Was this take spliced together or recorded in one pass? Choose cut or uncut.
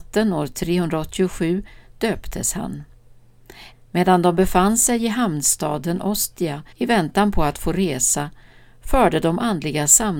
cut